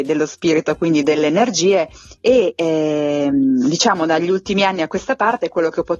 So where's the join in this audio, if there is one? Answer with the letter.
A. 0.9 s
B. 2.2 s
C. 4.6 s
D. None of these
B